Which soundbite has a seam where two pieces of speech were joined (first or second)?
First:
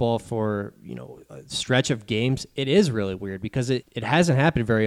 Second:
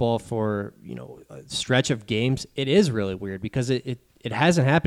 first